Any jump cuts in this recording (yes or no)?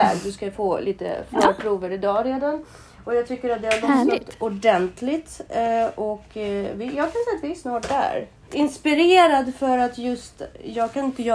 yes